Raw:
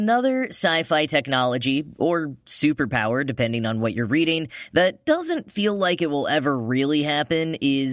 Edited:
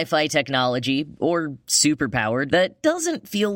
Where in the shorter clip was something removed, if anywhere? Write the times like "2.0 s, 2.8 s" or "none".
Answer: 2.5 s